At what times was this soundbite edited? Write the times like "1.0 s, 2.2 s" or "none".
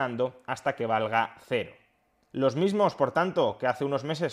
none